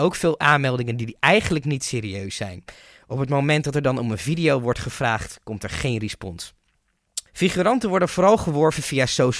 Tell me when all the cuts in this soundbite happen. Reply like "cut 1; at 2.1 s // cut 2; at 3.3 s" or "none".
cut 1; at 7.3 s